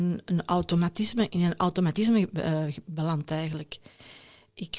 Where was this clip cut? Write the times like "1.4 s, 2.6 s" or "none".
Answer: 1.3 s